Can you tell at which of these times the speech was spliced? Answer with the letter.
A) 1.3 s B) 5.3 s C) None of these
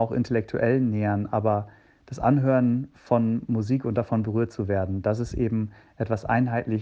C